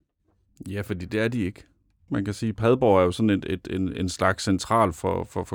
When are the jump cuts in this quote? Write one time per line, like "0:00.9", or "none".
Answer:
0:02.1